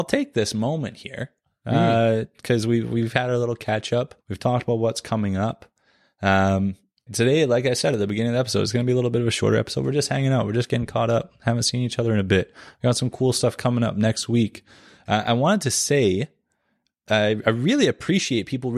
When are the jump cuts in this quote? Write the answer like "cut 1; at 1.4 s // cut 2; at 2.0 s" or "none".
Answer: cut 1; at 4.2 s // cut 2; at 7.1 s

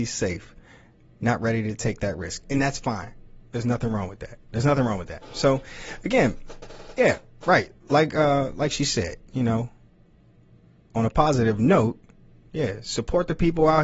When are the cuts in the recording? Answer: none

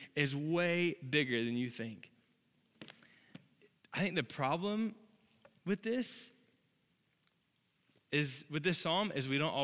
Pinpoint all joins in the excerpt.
none

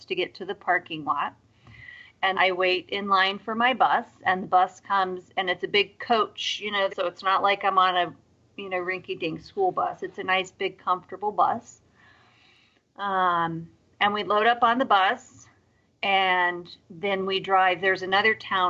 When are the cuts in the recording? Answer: cut 1; at 2.3 s // cut 2; at 6.9 s

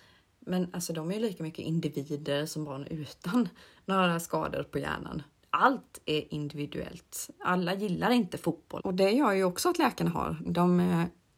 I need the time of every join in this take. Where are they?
cut 1; at 8.8 s // cut 2; at 10.5 s

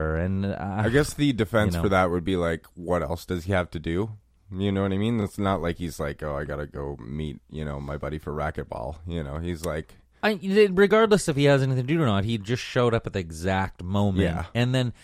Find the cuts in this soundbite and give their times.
none

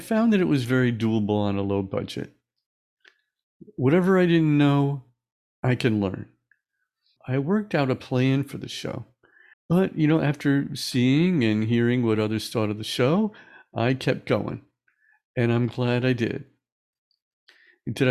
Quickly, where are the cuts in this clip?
cut 1; at 7.2 s // cut 2; at 9.5 s

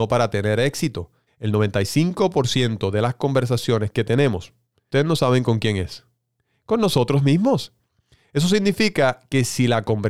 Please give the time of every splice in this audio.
cut 1; at 1.3 s

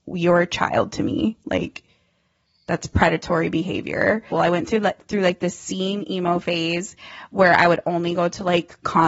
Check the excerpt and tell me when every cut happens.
cut 1; at 4.3 s

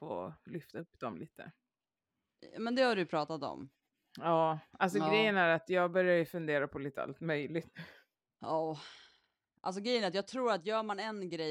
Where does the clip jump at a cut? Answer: none

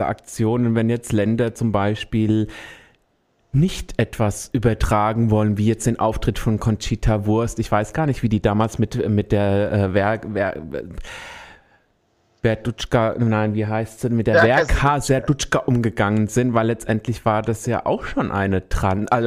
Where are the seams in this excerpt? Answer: none

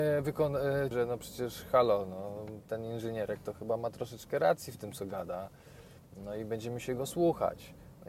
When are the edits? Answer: cut 1; at 0.9 s

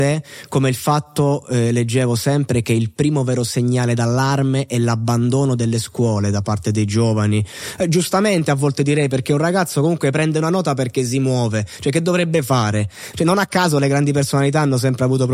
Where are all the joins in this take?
cut 1; at 13.1 s

